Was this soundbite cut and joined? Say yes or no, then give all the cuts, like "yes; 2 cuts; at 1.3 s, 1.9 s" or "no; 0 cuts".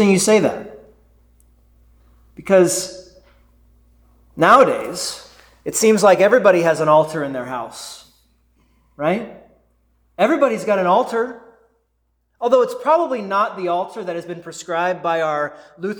no; 0 cuts